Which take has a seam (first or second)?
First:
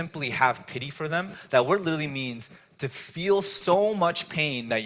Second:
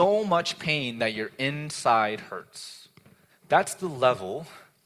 second